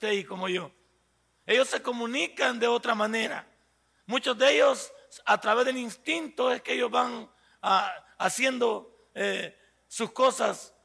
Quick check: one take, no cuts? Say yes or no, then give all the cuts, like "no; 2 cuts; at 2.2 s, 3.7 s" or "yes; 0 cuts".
yes; 0 cuts